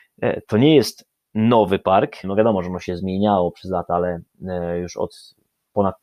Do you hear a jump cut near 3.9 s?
no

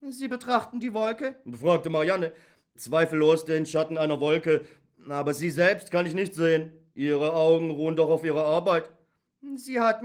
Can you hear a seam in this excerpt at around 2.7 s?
yes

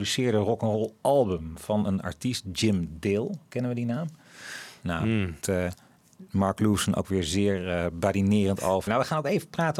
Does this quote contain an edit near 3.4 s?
no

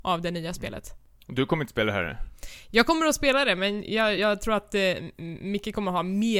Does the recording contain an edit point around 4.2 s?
no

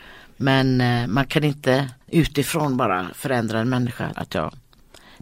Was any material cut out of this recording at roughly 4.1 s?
yes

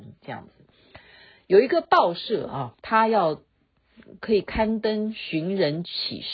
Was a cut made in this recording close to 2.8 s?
yes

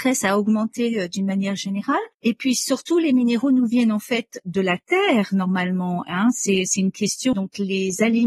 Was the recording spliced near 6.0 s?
no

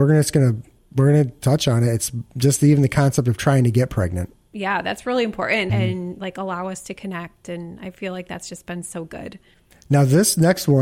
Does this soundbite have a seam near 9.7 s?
no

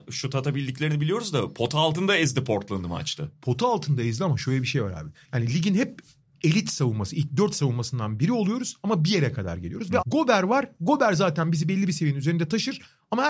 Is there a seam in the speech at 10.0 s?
yes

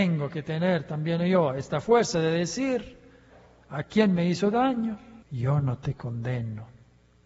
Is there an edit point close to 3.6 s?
no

